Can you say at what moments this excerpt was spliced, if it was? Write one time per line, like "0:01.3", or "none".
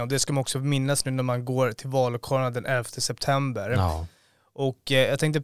none